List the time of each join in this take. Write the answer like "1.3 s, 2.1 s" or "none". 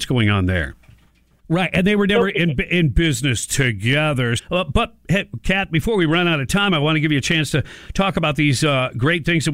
1.4 s, 4.4 s